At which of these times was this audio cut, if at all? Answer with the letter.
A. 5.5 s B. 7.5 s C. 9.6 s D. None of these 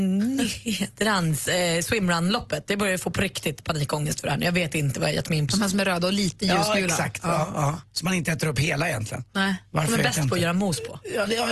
A